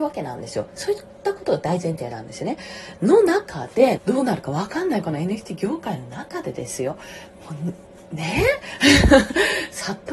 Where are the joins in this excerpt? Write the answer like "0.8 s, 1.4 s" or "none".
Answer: 4.0 s